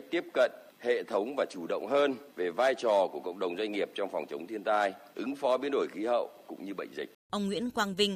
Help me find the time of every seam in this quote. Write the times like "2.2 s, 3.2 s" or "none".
7.1 s